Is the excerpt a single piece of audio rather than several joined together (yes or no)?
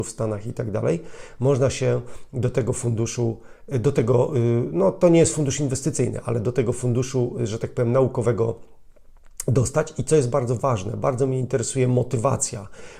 yes